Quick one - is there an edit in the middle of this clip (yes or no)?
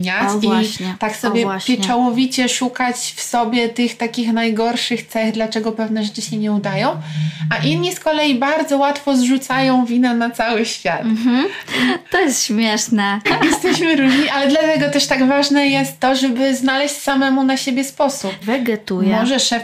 yes